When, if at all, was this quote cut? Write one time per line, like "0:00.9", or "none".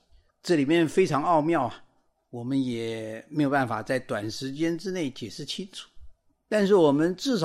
none